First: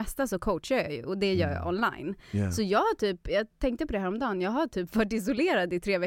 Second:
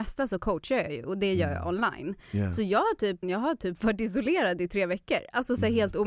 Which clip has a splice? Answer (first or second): second